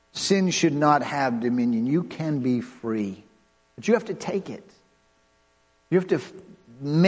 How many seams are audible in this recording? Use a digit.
0